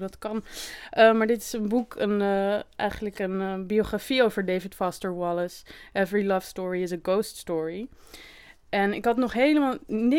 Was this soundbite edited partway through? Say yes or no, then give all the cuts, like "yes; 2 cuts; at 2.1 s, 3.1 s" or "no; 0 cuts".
no; 0 cuts